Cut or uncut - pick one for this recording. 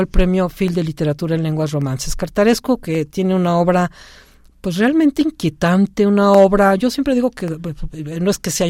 uncut